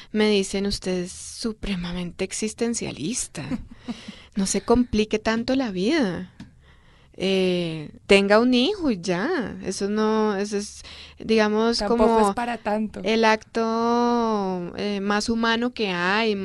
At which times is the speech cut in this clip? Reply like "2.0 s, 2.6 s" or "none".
8.0 s